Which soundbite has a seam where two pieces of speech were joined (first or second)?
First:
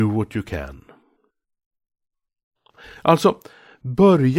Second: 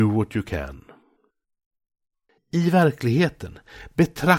second